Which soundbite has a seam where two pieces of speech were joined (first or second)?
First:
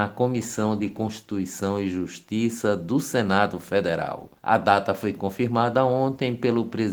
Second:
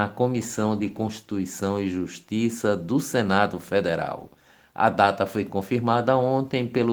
first